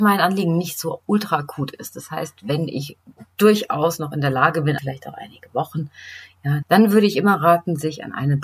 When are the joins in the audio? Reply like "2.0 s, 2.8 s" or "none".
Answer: 4.8 s, 6.6 s

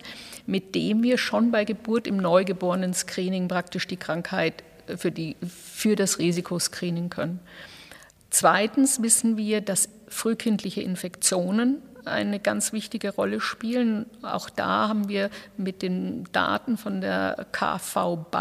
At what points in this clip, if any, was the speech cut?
none

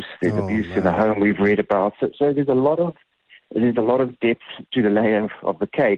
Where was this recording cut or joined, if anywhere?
none

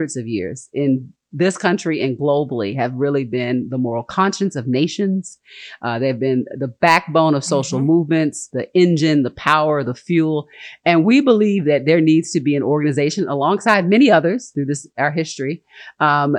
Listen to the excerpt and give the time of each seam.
none

